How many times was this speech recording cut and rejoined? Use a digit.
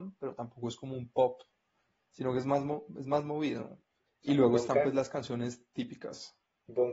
1